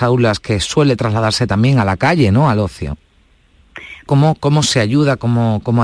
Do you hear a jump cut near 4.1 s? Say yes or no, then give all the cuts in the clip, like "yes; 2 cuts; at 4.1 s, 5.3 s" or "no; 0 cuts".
yes; 1 cut; at 4.1 s